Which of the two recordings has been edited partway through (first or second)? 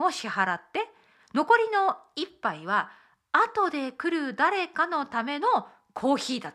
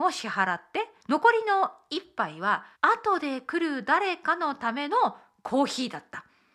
second